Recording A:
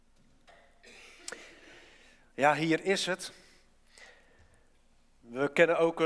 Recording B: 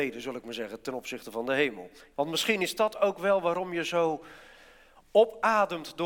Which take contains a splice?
B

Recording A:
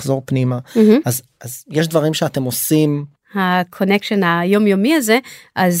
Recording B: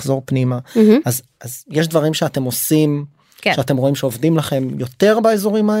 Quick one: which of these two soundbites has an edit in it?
A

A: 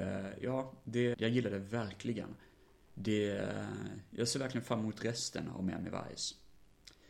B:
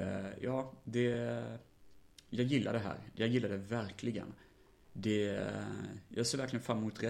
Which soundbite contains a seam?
A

